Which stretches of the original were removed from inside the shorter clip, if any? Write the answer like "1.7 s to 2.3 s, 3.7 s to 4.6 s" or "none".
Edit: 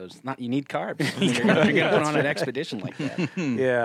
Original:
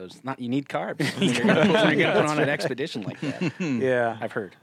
1.7 s to 1.9 s